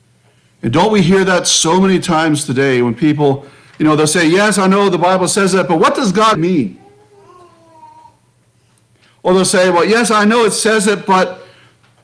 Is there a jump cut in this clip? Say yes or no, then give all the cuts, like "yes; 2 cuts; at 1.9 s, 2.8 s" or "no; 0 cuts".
yes; 1 cut; at 6.3 s